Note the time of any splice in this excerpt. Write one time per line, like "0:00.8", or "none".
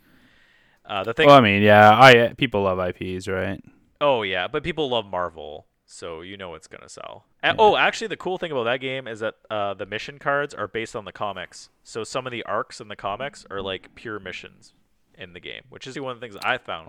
0:07.3
0:15.9